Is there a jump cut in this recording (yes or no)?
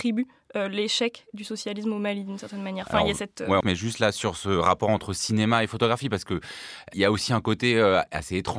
yes